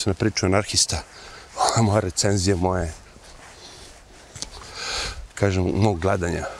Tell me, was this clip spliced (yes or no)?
no